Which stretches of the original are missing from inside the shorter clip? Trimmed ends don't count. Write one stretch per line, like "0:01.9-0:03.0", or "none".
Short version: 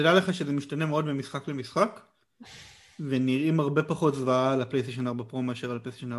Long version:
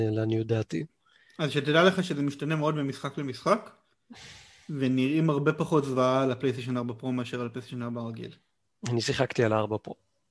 none